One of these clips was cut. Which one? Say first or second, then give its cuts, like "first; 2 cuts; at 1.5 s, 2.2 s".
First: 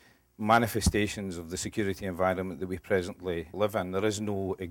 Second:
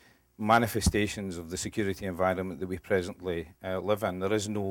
first; 1 cut; at 3.5 s